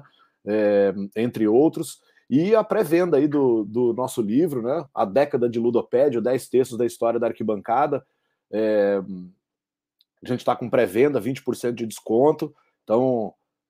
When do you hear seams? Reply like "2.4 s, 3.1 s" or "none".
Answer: none